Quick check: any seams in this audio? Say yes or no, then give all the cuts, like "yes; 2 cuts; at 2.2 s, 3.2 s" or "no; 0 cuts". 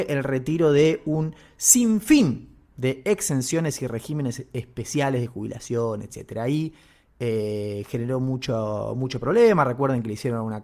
no; 0 cuts